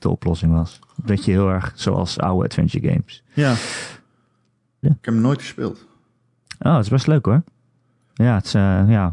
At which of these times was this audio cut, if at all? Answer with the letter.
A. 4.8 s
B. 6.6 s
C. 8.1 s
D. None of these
A